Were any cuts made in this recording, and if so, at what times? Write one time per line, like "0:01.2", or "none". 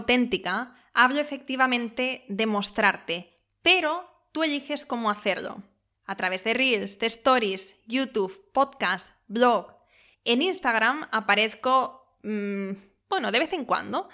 0:10.1